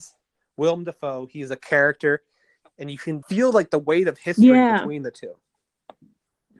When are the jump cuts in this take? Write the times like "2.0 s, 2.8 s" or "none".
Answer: 3.2 s